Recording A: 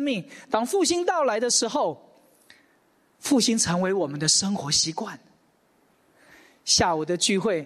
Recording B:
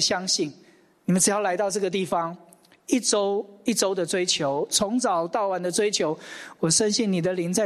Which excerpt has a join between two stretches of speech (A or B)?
B